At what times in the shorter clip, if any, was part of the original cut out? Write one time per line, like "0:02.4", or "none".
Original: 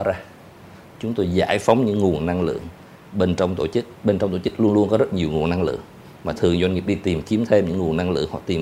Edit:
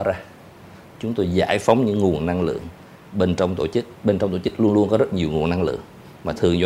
none

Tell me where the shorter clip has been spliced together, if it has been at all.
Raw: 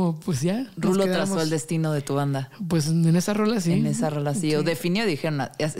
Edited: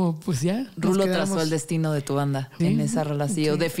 0:02.6

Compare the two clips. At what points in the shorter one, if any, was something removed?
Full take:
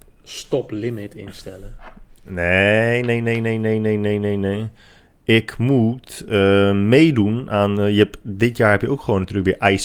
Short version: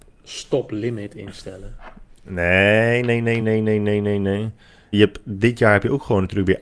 0:03.4
0:04.9

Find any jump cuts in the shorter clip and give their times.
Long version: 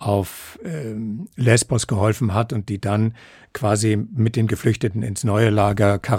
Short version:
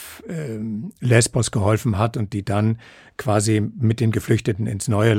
none

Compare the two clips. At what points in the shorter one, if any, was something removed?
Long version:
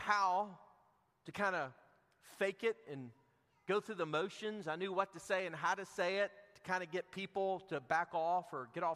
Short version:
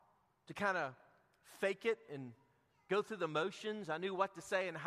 none

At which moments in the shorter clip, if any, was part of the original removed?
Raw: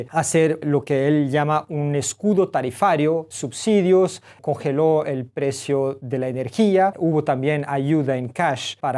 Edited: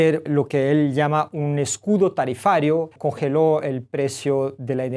0:02.9

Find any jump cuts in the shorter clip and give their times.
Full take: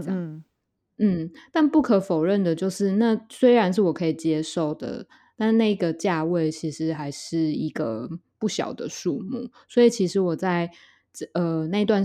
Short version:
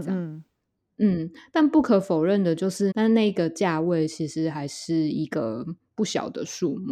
0:02.9

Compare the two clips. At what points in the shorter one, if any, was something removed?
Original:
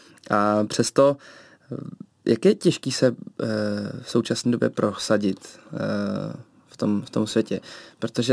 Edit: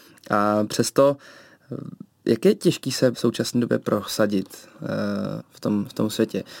0:03.1
0:05.4

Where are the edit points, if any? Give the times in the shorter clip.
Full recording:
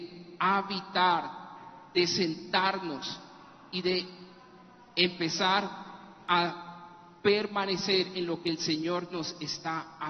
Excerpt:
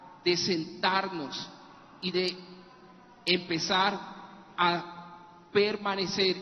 none

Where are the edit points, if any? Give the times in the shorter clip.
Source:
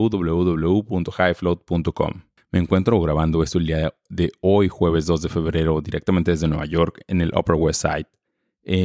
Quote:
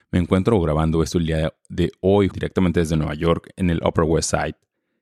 0:02.3

